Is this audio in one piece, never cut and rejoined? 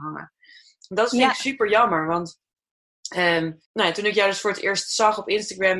no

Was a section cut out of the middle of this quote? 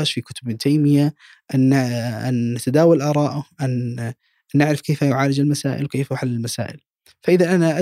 no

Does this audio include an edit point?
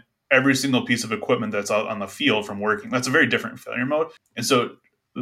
yes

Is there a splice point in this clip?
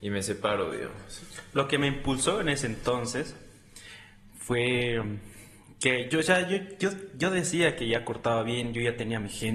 no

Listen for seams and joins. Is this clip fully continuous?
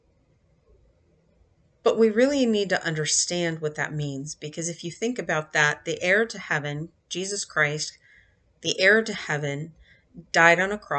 yes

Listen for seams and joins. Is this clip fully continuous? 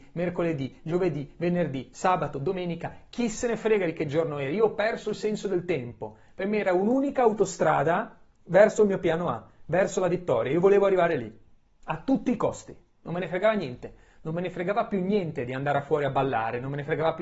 yes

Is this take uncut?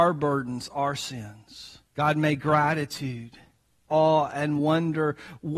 no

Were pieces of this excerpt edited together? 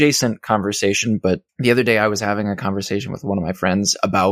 yes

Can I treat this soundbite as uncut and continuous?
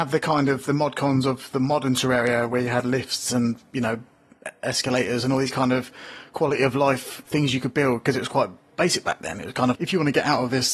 no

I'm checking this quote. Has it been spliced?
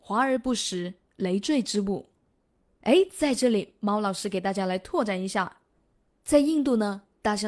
no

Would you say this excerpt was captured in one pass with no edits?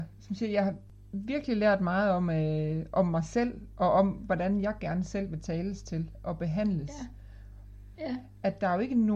no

